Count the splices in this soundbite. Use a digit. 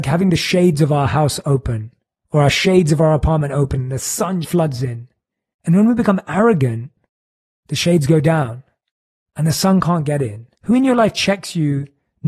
2